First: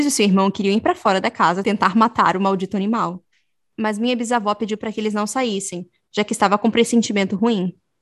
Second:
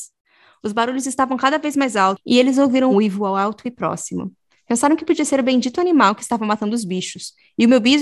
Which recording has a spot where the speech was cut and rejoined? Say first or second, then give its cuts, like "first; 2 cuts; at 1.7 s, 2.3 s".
second; 1 cut; at 2.9 s